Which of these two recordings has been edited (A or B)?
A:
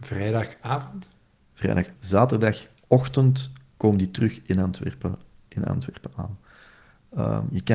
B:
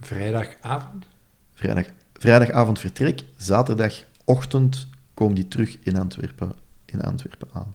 A